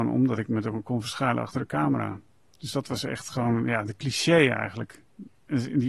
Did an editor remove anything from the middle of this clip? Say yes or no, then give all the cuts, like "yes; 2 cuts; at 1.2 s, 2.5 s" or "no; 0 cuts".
no; 0 cuts